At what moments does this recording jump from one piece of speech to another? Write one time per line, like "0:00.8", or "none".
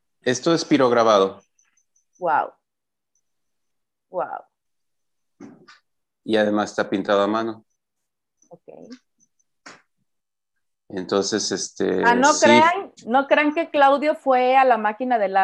none